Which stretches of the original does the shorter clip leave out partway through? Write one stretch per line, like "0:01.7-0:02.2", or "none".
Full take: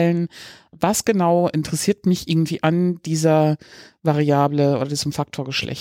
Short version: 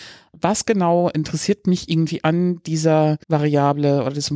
0:03.6-0:04.0